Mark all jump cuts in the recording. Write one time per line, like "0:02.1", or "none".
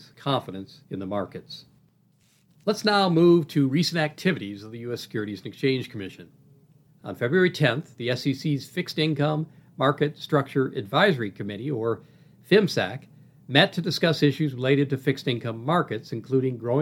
none